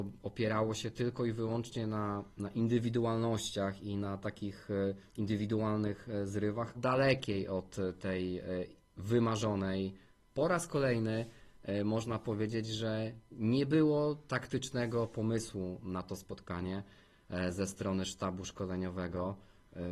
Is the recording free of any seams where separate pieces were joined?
no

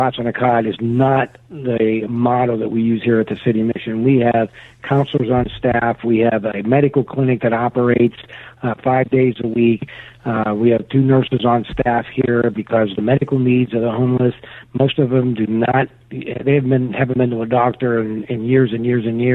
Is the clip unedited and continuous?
yes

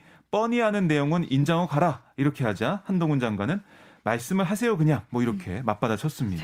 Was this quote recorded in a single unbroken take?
yes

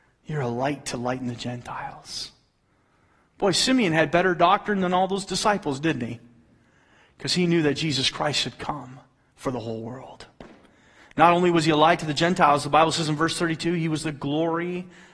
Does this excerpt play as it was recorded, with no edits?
yes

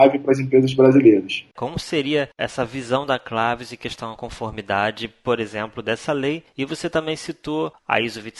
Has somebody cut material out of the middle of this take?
yes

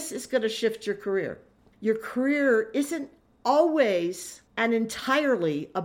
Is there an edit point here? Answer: yes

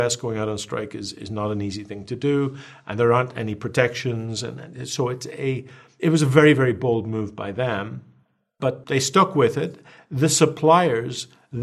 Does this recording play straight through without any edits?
yes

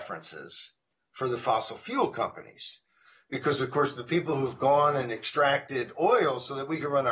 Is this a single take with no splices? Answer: yes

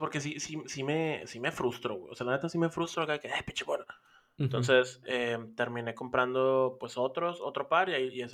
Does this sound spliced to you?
no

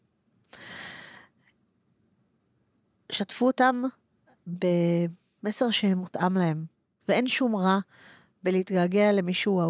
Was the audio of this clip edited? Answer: yes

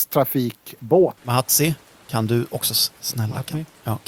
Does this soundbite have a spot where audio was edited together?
yes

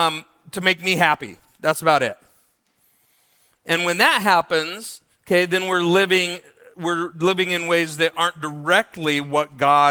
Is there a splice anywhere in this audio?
no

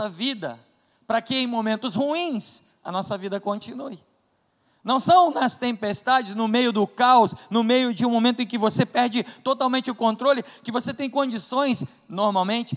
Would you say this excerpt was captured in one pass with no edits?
yes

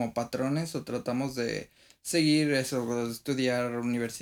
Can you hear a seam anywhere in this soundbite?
no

